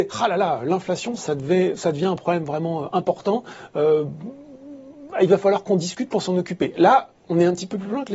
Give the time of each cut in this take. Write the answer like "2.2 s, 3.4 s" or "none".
7.2 s